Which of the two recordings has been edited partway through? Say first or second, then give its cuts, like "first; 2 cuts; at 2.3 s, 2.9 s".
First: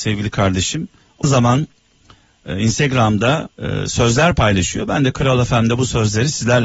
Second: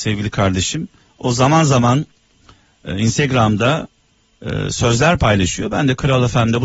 first; 2 cuts; at 1.2 s, 3.5 s